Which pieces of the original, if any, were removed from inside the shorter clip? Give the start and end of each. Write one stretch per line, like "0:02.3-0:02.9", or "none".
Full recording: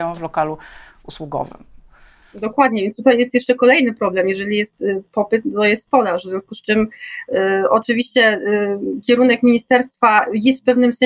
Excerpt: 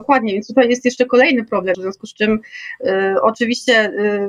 0:04.2-0:06.2